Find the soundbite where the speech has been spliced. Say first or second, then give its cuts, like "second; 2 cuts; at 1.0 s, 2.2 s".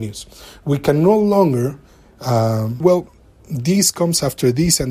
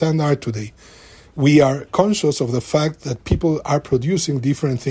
first; 1 cut; at 2.8 s